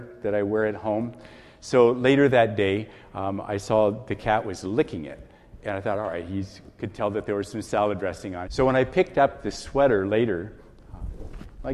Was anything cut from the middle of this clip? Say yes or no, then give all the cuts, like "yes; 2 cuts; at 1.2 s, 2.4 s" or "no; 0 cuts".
yes; 1 cut; at 8.5 s